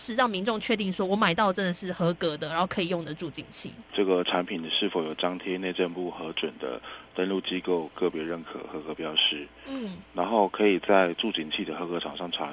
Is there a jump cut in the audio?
yes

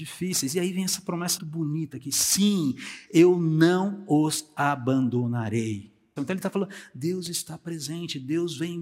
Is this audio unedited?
no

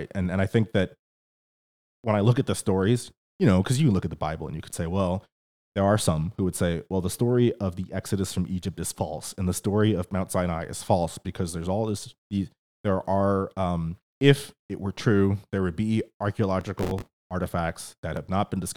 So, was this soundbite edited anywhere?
yes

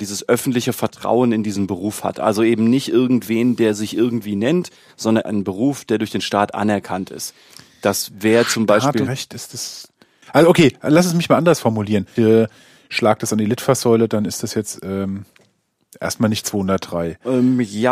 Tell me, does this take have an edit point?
yes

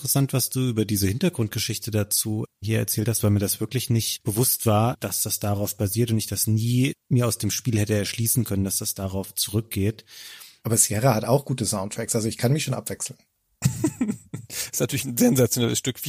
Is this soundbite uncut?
no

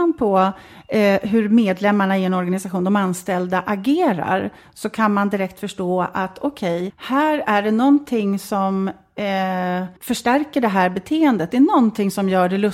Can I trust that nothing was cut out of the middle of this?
no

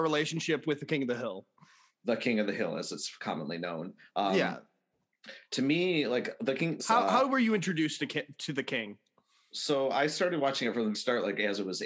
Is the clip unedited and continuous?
no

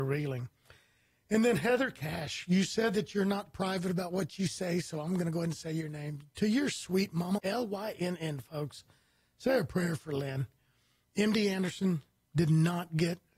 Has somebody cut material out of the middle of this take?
yes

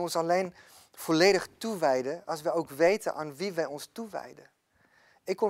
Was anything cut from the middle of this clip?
no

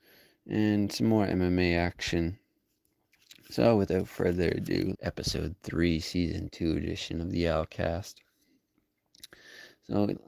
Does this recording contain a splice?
yes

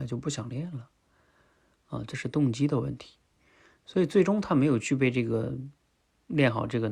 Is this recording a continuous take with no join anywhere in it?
yes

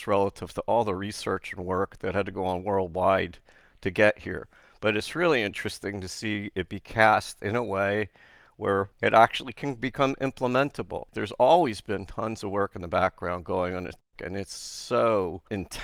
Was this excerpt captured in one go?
no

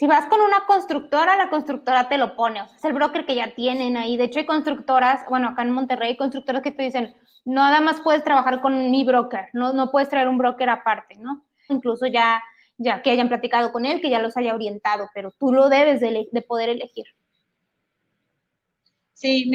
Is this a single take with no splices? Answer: no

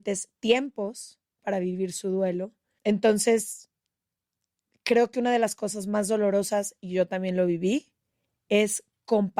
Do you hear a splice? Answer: no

